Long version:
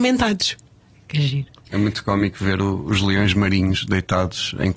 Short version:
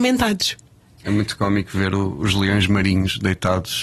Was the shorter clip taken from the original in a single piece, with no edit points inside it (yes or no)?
no